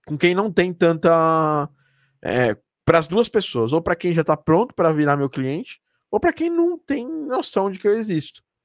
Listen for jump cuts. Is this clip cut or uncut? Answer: uncut